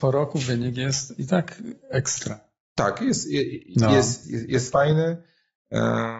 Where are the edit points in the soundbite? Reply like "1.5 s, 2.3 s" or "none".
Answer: 4.2 s